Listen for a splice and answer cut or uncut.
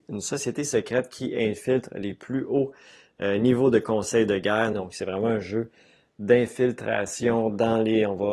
cut